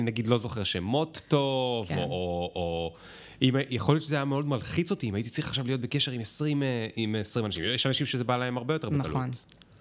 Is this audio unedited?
yes; 0 cuts

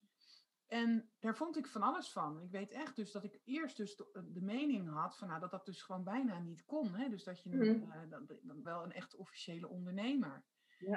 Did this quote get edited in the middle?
yes; 1 cut; at 8.6 s

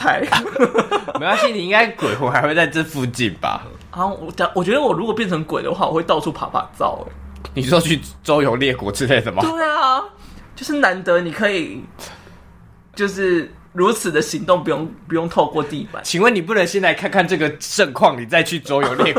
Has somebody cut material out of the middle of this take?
no; 0 cuts

